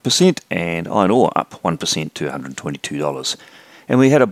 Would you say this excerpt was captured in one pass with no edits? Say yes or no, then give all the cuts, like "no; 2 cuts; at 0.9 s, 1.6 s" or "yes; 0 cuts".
yes; 0 cuts